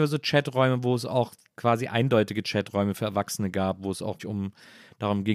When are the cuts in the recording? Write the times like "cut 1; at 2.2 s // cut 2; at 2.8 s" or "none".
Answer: cut 1; at 4.2 s